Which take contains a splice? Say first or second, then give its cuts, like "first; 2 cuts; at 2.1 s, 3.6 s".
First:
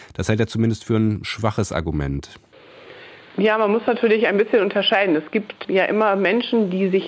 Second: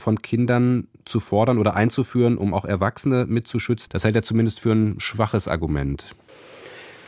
second; 1 cut; at 3.9 s